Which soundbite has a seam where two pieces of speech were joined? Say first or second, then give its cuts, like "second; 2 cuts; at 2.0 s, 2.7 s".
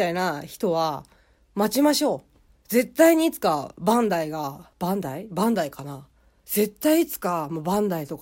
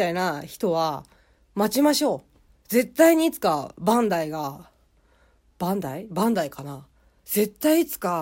first; 1 cut; at 4.7 s